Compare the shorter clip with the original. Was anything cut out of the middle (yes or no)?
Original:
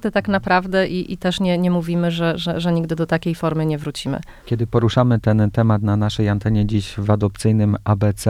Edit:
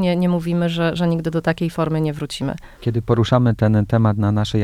yes